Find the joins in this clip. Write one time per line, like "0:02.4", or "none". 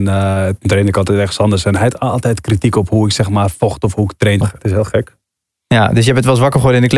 0:04.4